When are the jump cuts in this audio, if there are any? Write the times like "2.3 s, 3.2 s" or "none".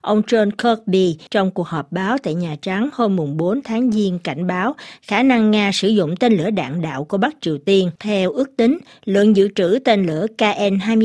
1.3 s, 8.0 s

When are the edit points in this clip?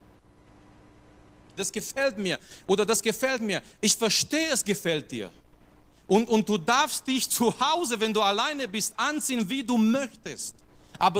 1.6 s

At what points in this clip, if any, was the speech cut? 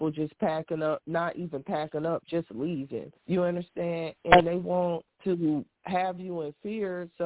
3.1 s, 5.1 s

